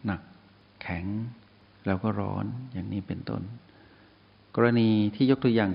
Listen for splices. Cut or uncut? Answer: uncut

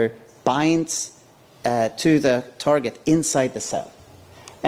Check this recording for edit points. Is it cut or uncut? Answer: uncut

